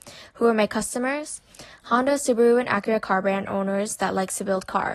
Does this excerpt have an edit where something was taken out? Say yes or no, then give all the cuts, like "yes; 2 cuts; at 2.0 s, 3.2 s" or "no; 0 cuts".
no; 0 cuts